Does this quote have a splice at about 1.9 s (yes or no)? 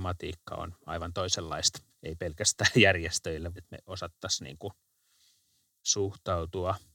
yes